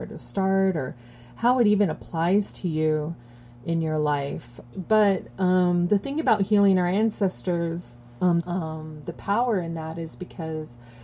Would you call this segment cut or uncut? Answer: cut